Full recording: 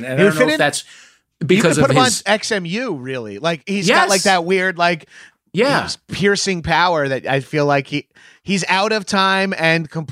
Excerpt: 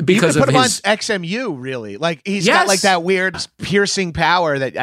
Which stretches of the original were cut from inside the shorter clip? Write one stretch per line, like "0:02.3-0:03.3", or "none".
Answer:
0:04.8-0:05.8

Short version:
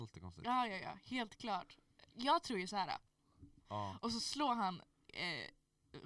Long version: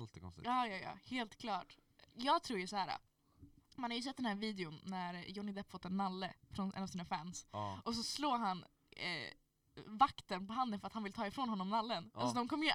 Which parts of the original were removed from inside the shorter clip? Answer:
0:03.6-0:07.5

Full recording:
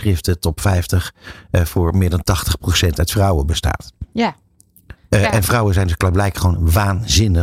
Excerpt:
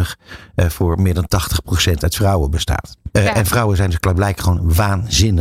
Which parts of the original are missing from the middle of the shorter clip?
0:04.1-0:05.1

